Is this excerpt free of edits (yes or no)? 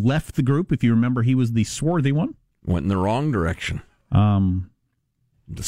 yes